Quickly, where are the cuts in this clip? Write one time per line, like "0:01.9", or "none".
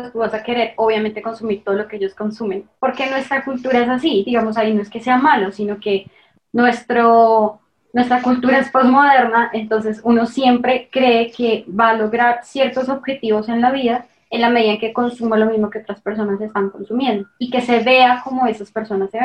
0:02.8